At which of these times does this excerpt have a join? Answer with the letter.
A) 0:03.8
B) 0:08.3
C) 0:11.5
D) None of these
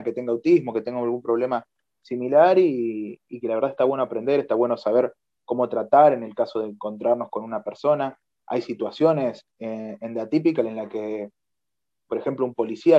D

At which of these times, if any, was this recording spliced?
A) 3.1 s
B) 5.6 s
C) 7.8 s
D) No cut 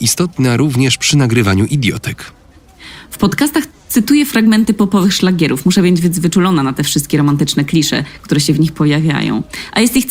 D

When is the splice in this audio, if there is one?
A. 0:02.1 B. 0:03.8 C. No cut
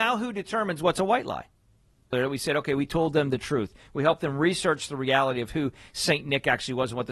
A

